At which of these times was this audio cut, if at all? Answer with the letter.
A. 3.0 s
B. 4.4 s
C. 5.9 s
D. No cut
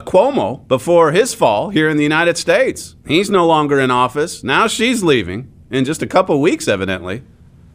A